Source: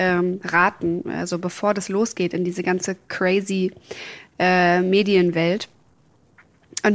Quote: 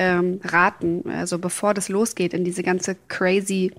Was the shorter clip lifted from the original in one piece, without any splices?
yes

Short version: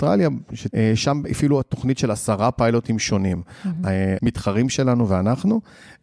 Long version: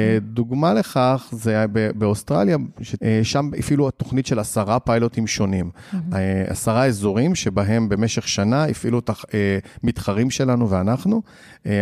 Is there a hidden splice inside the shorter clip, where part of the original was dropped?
yes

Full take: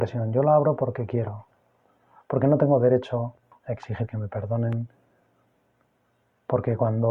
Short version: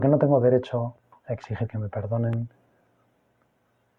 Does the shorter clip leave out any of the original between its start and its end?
no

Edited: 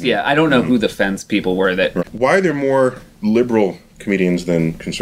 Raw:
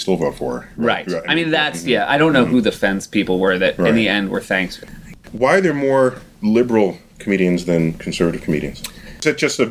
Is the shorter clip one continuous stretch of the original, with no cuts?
no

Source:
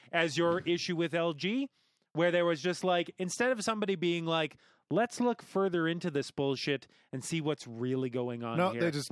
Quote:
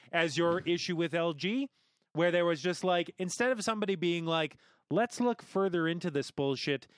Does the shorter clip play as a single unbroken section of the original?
yes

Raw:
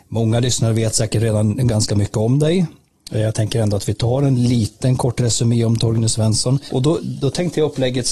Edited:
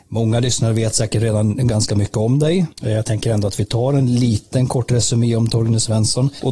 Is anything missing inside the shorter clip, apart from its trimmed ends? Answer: yes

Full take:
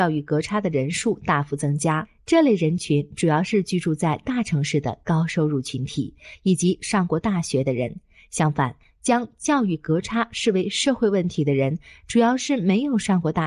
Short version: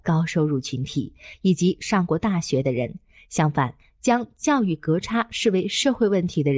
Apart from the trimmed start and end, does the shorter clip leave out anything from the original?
no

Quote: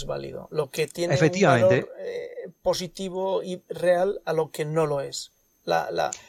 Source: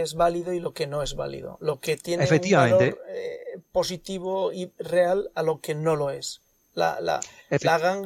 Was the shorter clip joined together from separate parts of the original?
no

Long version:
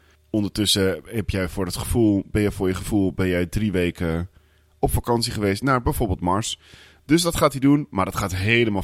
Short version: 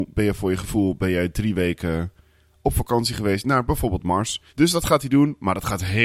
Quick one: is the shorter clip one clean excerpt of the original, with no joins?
no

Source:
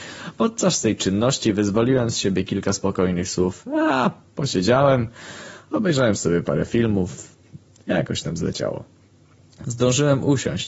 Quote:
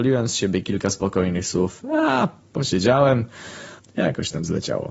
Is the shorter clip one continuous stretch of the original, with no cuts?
no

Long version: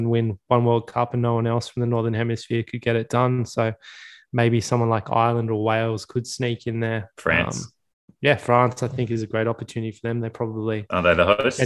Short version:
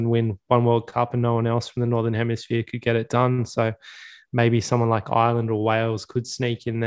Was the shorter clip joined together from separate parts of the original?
no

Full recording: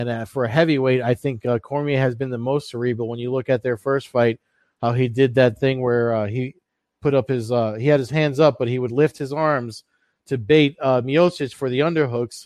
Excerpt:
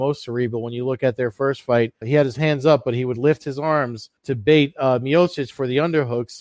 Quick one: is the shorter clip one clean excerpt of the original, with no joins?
no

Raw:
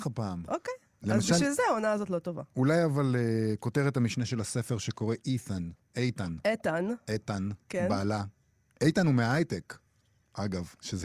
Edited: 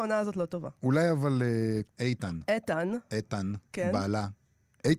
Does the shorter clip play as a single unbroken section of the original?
no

